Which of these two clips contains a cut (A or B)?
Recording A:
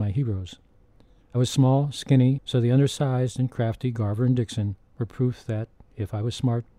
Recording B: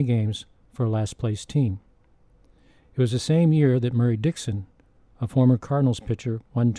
A